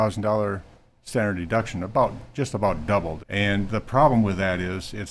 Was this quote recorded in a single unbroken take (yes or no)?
no